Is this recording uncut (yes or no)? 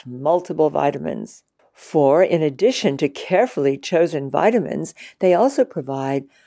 no